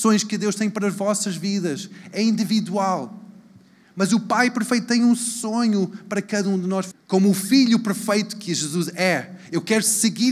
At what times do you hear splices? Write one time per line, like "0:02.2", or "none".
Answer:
0:06.9